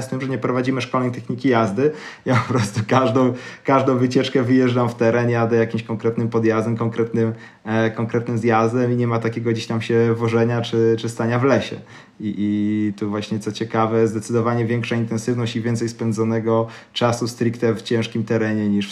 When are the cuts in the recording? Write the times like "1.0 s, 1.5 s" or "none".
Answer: none